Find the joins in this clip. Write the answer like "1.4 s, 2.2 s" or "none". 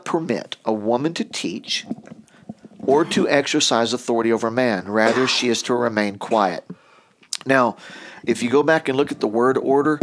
8.2 s